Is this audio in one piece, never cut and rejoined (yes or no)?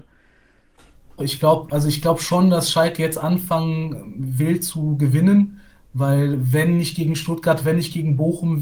no